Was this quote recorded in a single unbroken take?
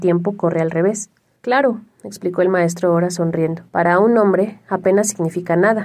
no; 2 cuts; at 1.4 s, 3.7 s

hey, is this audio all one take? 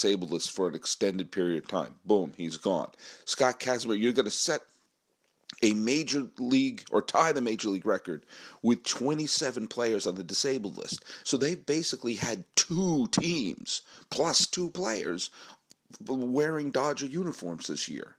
no; 1 cut; at 11.2 s

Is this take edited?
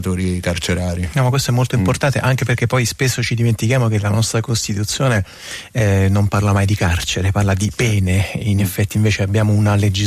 no; 0 cuts

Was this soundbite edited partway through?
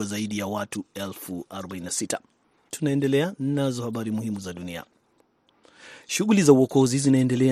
yes; 1 cut; at 2.7 s

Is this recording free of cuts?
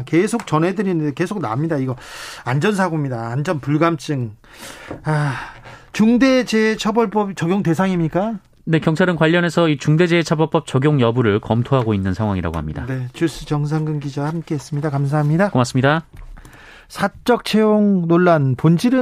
yes; 0 cuts

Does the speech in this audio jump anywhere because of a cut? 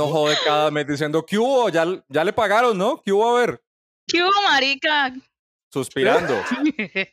yes; 1 cut; at 5.5 s

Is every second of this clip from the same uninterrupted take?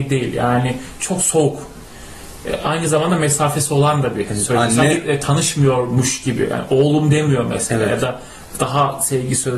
yes; 0 cuts

